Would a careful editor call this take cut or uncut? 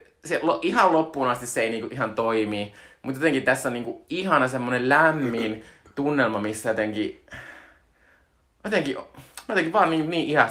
uncut